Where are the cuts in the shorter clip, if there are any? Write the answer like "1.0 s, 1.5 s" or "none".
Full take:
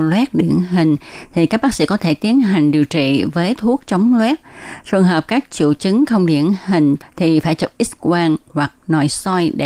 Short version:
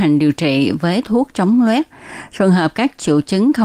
none